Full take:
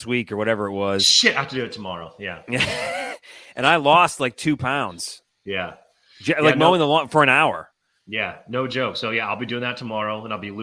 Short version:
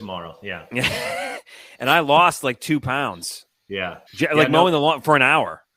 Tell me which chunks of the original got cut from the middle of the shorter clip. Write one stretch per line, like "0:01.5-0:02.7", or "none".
0:05.8-0:06.1

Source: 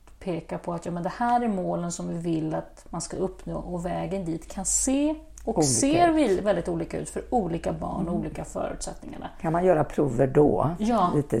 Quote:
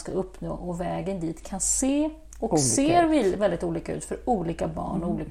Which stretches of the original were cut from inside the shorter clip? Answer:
none

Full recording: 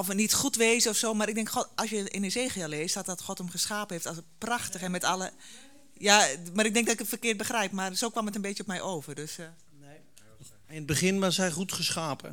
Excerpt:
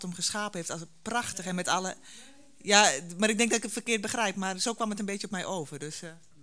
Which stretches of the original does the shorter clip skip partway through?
none

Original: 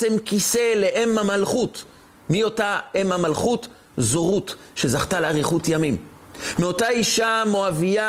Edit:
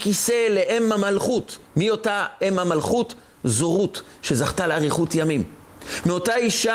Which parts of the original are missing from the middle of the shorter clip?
0:01.9-0:02.2

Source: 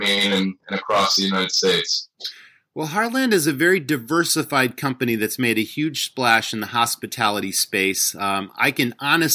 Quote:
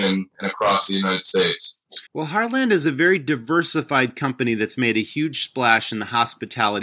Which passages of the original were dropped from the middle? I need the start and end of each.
0:02.3-0:02.7

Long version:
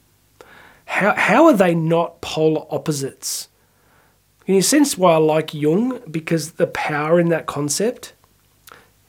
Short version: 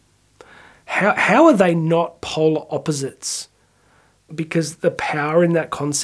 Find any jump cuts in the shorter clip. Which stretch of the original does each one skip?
0:04.3-0:06.0

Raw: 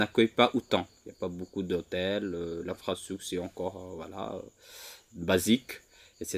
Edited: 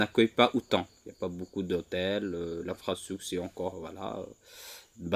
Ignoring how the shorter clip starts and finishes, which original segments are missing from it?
0:03.7-0:03.9

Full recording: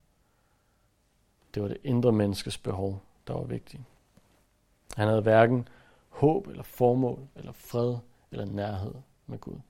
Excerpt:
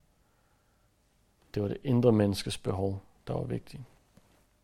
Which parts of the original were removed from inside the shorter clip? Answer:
none

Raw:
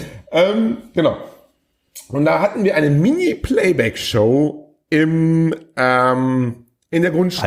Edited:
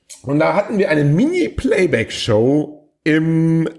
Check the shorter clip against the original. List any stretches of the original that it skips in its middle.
none

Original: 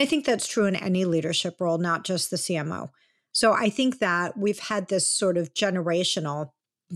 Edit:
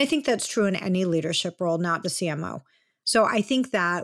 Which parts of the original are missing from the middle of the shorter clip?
0:02.0-0:02.3

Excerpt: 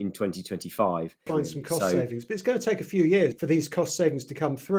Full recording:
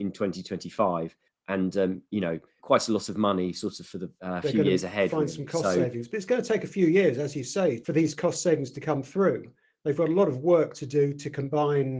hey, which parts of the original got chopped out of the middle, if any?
0:01.3-0:05.1
0:07.1-0:07.8

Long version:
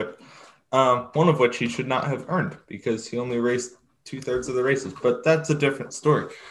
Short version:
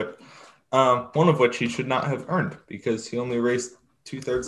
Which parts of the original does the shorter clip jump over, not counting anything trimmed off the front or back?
none

